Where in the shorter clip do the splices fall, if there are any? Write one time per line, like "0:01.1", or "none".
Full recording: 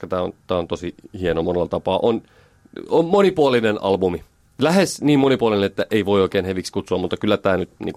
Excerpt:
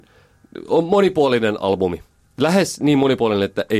none